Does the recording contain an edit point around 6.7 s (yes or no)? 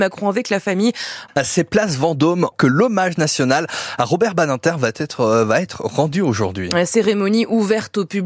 no